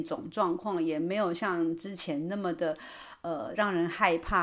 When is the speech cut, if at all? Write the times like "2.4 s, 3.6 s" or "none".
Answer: none